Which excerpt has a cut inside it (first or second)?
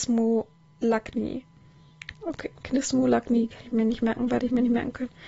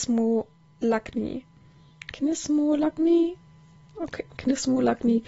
first